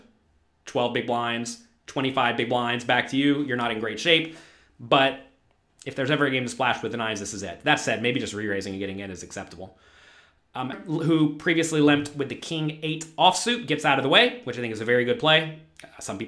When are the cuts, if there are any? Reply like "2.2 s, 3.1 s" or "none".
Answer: 10.7 s